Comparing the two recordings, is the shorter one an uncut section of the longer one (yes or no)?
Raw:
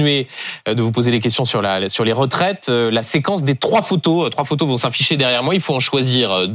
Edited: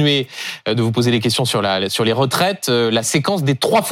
yes